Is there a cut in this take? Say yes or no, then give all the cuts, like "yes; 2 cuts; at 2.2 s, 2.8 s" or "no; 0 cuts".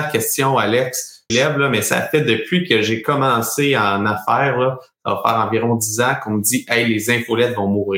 yes; 1 cut; at 1.3 s